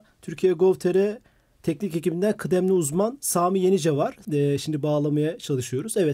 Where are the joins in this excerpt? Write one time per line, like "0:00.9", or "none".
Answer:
0:04.2